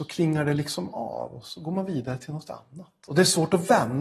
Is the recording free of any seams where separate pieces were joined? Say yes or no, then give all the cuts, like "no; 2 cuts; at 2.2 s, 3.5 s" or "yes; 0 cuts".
yes; 0 cuts